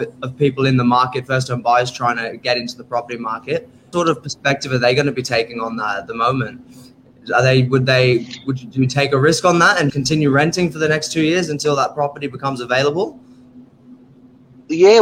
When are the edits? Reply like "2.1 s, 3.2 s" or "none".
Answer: 3.9 s, 9.9 s